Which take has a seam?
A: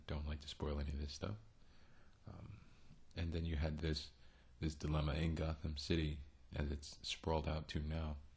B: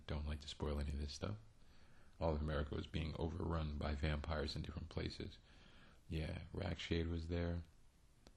B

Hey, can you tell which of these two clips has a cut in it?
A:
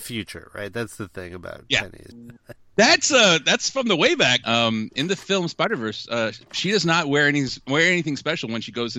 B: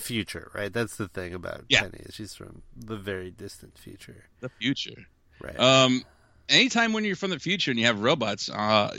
A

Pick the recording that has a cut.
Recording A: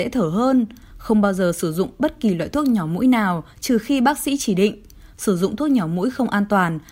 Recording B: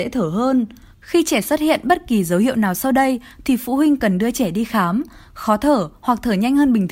B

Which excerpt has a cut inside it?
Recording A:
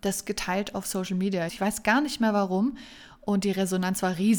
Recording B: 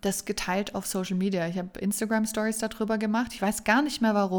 A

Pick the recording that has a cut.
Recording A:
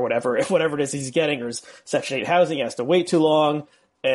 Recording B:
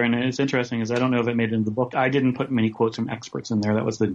B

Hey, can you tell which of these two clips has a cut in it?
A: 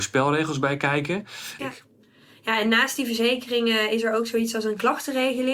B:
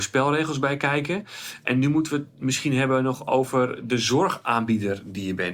A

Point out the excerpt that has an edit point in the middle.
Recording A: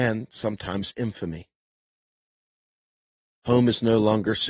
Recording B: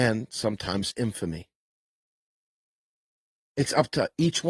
A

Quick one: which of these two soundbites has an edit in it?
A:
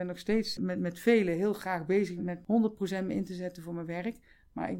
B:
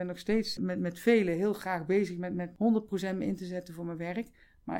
A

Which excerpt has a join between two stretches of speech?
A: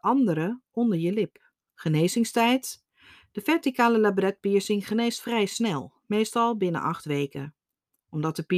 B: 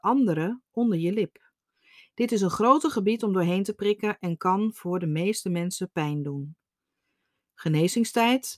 A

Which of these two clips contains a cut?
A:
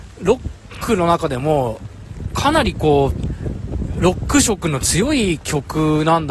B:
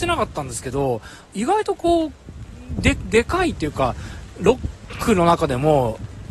B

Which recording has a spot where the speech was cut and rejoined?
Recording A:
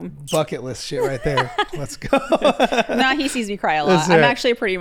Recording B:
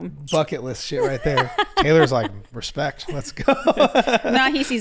A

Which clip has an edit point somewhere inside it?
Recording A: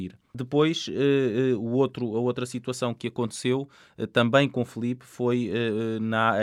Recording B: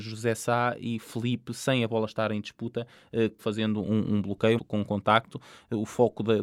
B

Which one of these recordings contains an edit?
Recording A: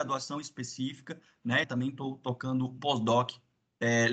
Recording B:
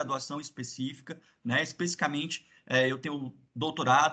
A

